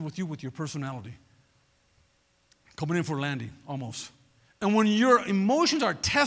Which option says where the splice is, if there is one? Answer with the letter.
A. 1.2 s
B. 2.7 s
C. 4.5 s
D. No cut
C